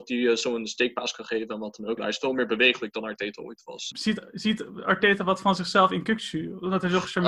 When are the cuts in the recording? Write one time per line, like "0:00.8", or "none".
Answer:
0:02.0
0:03.9